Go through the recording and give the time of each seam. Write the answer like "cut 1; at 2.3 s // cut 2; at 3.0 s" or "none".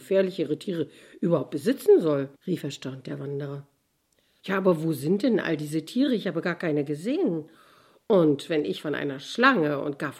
cut 1; at 2.4 s // cut 2; at 4.4 s

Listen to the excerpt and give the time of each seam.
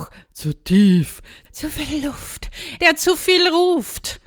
cut 1; at 1.4 s // cut 2; at 2.8 s

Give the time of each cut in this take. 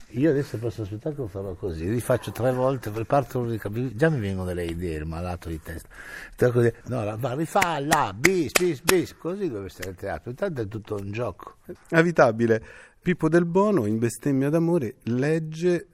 cut 1; at 6.8 s // cut 2; at 11.7 s

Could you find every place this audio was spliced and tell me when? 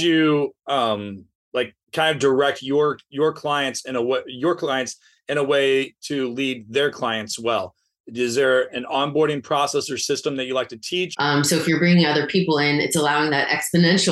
cut 1; at 1.8 s // cut 2; at 11.1 s

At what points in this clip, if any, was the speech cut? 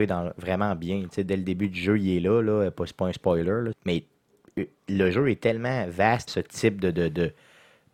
cut 1; at 3.7 s // cut 2; at 6.3 s

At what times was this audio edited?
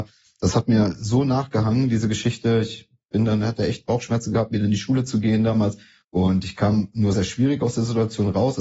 cut 1; at 6.0 s // cut 2; at 7.1 s

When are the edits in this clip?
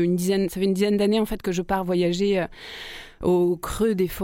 none

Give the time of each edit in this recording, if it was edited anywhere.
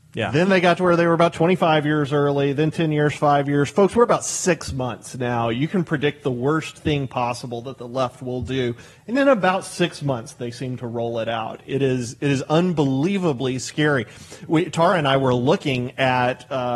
none

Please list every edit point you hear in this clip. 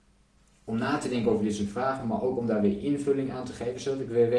none

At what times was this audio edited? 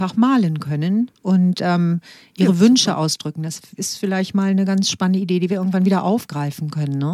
none

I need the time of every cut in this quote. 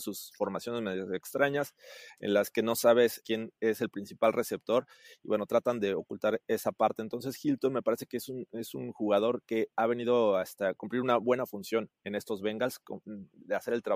cut 1; at 3.2 s

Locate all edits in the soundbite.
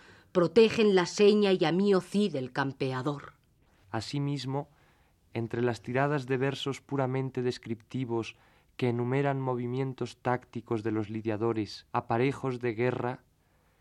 cut 1; at 3.8 s // cut 2; at 11.9 s

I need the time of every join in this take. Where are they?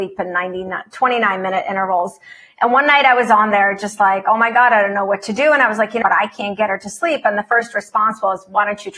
cut 1; at 6.0 s

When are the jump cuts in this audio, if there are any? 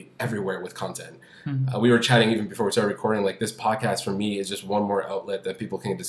none

